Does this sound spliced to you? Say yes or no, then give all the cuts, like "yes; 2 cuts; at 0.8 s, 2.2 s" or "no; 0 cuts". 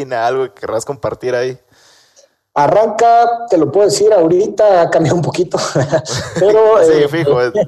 no; 0 cuts